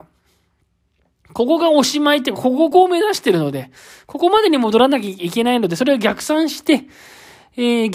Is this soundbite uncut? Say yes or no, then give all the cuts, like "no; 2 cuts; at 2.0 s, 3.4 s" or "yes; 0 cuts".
no; 1 cut; at 2.7 s